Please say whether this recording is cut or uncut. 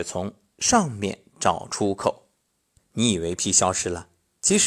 cut